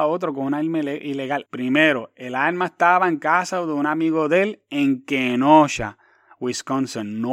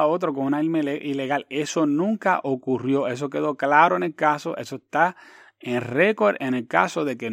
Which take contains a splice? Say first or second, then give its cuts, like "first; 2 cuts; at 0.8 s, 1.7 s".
first; 1 cut; at 1.5 s